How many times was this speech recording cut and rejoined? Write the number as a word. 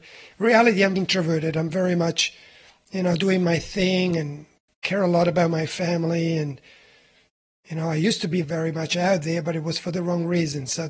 two